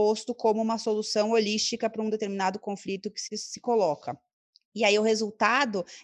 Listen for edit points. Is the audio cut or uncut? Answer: uncut